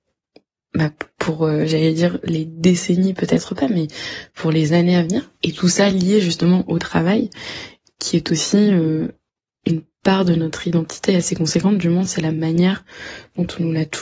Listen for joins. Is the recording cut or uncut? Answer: uncut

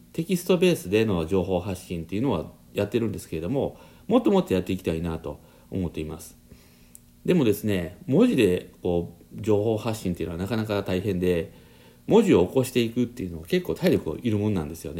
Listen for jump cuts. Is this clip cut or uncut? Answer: uncut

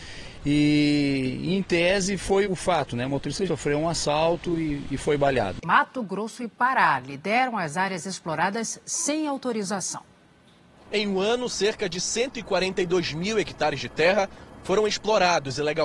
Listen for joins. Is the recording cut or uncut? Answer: cut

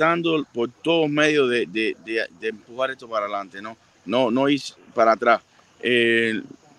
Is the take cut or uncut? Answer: uncut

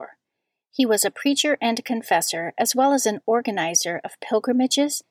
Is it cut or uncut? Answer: uncut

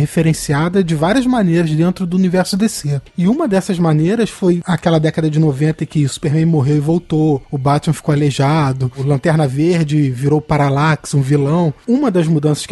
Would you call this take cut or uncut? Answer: uncut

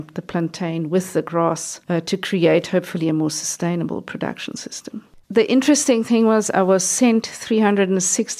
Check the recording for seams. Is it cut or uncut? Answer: cut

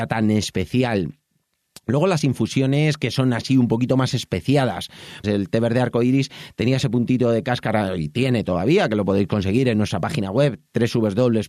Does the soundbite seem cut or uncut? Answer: cut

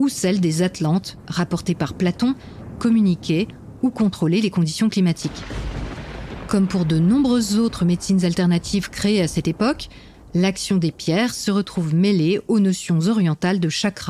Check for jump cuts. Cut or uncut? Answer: cut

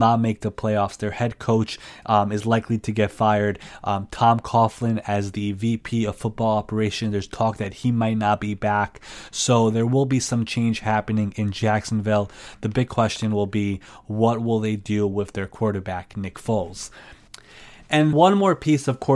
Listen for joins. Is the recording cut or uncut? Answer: cut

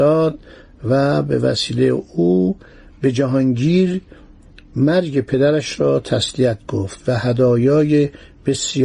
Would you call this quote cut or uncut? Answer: uncut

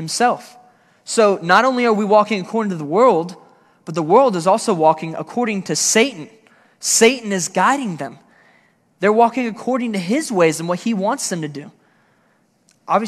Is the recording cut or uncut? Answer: uncut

